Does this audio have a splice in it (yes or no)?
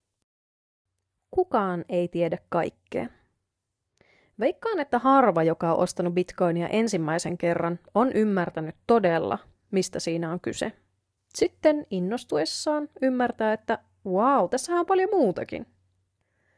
yes